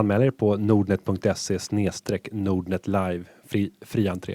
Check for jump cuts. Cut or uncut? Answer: uncut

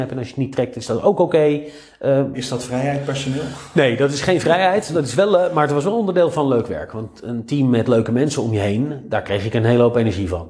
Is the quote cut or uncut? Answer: cut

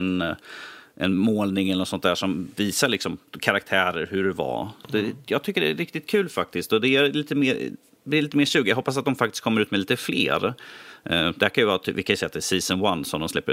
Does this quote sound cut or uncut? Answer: uncut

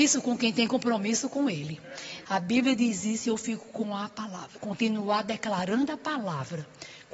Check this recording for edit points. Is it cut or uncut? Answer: cut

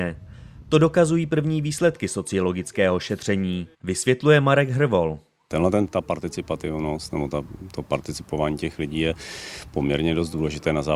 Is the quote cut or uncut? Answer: cut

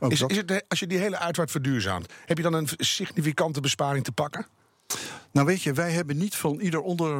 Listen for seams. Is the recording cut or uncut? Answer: uncut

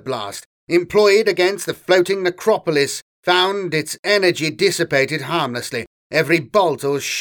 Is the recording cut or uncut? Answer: uncut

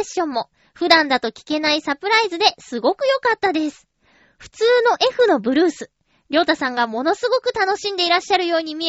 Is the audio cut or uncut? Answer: uncut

